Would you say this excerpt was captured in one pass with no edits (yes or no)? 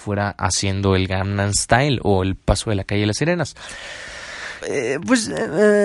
no